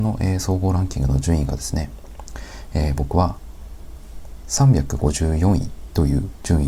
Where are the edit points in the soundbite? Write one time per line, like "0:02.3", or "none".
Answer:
none